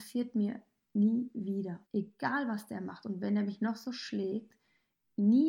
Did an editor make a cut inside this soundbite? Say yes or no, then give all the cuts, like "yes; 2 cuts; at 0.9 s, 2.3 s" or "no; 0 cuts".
yes; 1 cut; at 1.8 s